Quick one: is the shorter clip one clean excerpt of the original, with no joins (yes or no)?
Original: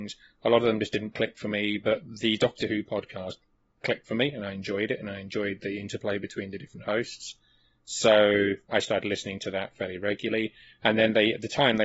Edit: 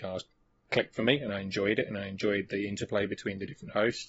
yes